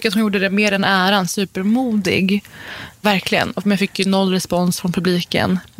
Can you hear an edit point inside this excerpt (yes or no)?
no